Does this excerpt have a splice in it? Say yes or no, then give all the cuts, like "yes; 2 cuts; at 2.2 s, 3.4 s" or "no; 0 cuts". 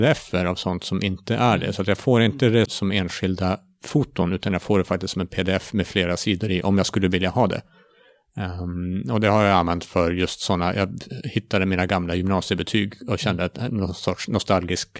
yes; 1 cut; at 2.7 s